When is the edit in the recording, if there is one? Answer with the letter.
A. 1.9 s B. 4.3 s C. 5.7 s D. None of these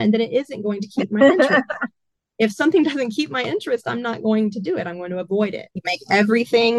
C